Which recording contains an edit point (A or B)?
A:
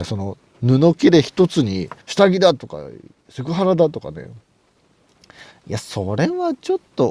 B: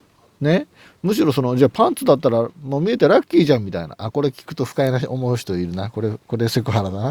A